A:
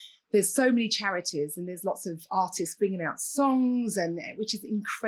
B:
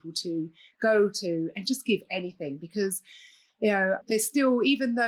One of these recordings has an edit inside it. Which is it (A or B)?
B